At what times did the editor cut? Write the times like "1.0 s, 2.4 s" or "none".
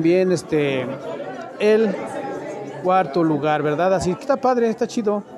4.2 s